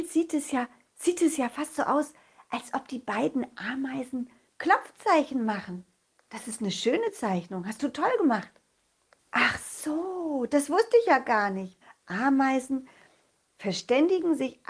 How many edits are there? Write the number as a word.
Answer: two